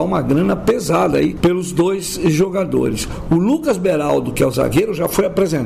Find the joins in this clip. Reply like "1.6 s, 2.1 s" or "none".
none